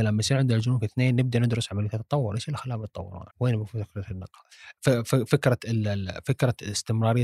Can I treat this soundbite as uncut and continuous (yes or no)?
no